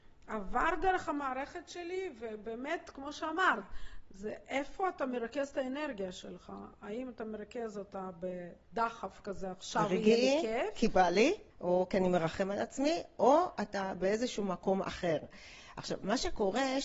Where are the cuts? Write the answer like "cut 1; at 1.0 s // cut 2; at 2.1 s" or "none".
cut 1; at 11.5 s